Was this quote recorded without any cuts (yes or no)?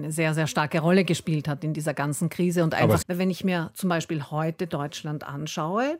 no